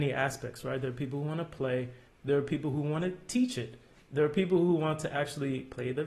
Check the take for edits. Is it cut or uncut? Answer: cut